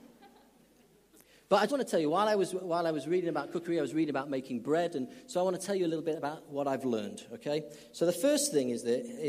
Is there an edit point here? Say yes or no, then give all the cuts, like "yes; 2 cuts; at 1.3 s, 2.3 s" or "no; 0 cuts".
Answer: yes; 1 cut; at 1.7 s